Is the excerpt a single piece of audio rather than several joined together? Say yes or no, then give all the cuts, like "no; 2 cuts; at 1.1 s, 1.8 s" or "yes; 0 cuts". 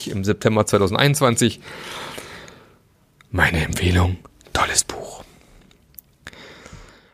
yes; 0 cuts